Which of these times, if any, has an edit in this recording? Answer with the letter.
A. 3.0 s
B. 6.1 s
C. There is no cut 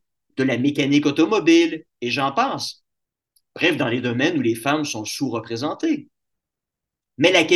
C